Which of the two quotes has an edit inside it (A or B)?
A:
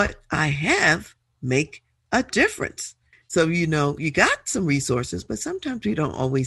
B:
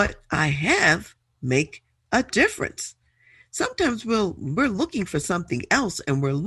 A